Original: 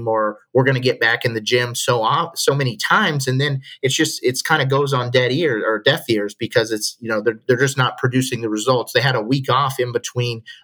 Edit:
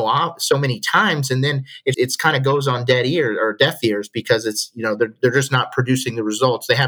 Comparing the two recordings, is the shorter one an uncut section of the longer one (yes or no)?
no